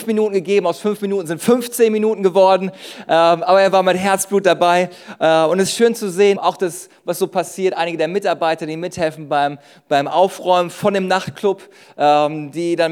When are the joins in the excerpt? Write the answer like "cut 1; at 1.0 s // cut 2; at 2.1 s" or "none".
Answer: cut 1; at 6.3 s